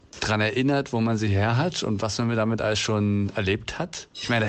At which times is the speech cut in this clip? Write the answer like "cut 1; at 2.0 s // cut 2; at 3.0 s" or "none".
none